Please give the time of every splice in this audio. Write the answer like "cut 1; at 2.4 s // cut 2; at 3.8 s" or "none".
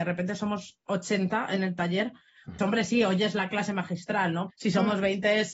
cut 1; at 2.6 s // cut 2; at 4.5 s